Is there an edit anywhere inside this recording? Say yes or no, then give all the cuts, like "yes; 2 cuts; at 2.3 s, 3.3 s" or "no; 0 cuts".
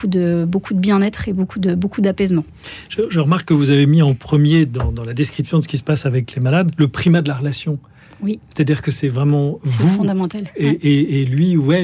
no; 0 cuts